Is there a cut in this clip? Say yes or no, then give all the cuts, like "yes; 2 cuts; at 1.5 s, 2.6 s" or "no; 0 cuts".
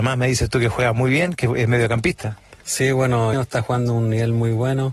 yes; 1 cut; at 3.3 s